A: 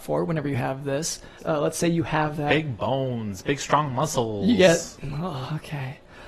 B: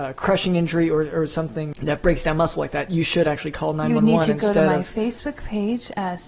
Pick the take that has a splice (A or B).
A